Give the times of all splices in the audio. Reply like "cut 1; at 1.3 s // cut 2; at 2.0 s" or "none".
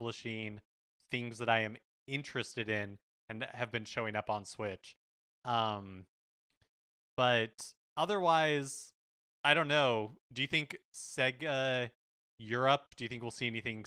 none